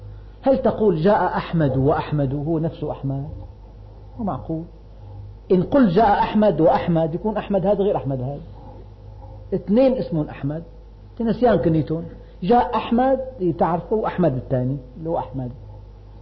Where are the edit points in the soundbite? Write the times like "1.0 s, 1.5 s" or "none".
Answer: none